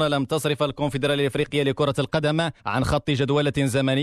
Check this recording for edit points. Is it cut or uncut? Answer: cut